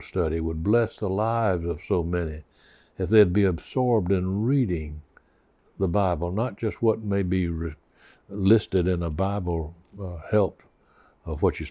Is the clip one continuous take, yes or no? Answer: yes